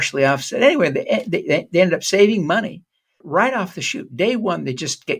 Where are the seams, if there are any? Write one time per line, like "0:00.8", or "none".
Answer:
0:03.2